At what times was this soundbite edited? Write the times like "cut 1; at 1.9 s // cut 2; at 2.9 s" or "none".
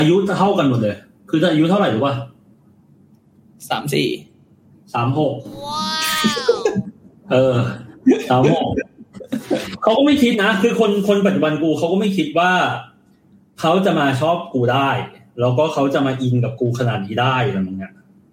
none

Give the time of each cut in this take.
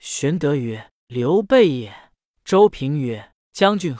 cut 1; at 2.3 s

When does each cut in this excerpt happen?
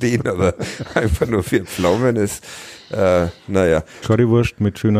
cut 1; at 4.0 s

